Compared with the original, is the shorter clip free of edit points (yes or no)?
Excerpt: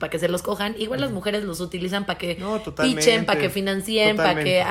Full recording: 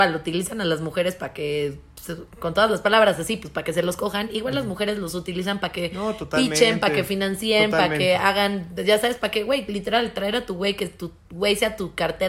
yes